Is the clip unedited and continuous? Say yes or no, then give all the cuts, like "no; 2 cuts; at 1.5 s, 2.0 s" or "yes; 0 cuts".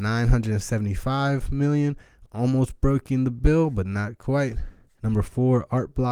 no; 1 cut; at 5.0 s